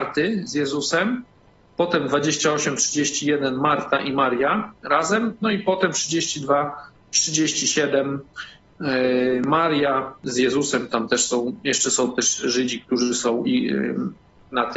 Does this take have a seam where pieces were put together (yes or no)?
no